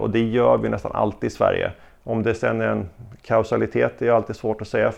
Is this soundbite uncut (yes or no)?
no